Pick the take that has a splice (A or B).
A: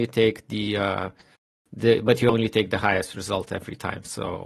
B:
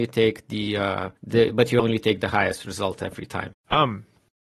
B